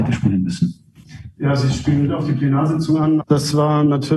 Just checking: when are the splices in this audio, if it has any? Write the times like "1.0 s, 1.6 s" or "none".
3.2 s